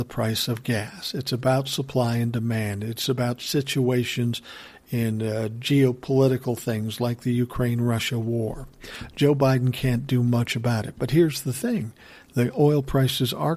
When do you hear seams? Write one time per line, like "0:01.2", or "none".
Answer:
none